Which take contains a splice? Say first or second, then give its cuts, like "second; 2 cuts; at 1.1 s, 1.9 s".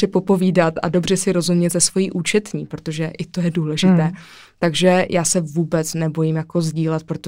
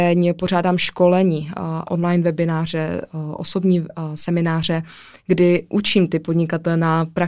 second; 1 cut; at 1.9 s